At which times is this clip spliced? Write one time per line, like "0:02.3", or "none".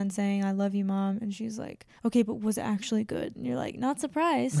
0:02.0
0:03.3